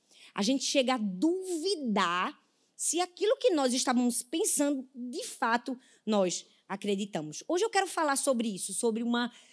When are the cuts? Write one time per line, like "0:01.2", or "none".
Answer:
none